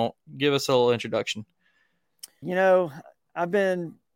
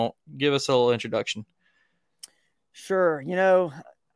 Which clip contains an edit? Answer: first; 1 cut; at 2.4 s

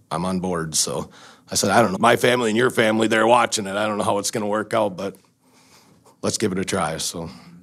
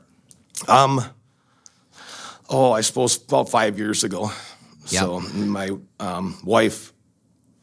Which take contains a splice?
first; 1 cut; at 2.0 s

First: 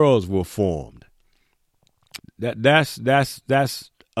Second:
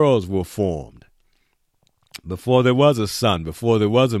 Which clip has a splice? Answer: first; 1 cut; at 2.2 s

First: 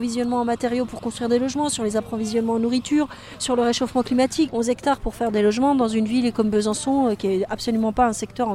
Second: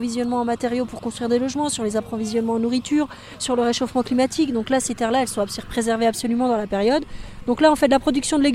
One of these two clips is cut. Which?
first; 1 cut; at 4.5 s

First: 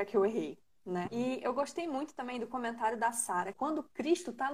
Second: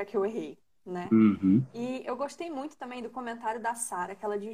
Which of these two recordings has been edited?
first; 2 cuts; at 1.1 s, 3.5 s

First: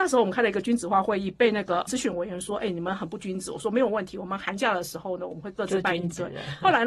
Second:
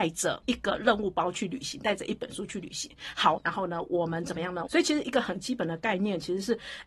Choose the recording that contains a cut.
second; 2 cuts; at 3.4 s, 4.7 s

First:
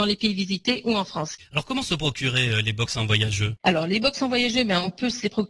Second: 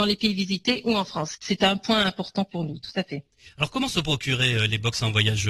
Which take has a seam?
first; 1 cut; at 1.4 s

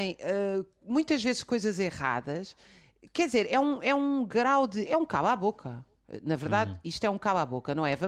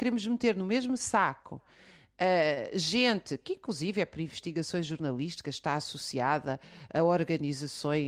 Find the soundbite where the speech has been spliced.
first; 1 cut; at 4.9 s

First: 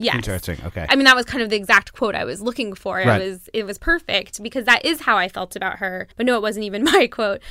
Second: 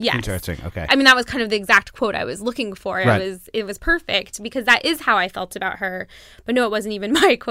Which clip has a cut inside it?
first; 1 cut; at 6.1 s

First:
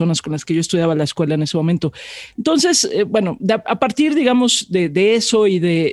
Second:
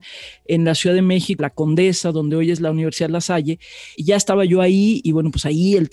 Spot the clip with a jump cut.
second; 2 cuts; at 1.4 s, 3.9 s

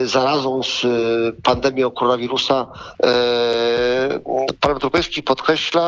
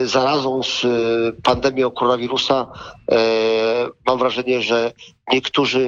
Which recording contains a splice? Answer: first; 1 cut; at 2.9 s

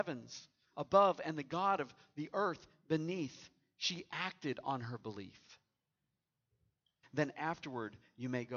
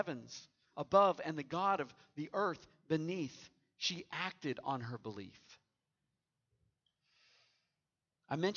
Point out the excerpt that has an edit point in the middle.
first; 1 cut; at 7.0 s

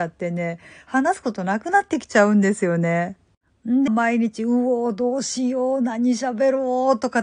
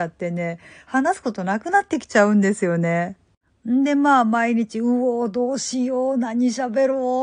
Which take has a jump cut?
first; 1 cut; at 3.9 s

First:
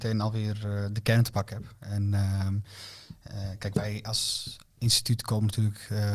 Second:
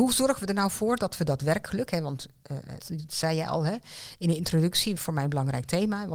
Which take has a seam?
second; 2 cuts; at 2.8 s, 5.0 s

